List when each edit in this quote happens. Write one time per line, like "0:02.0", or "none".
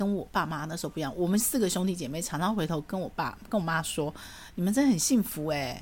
none

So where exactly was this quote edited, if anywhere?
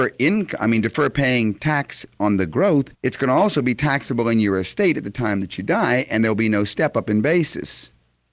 0:02.9

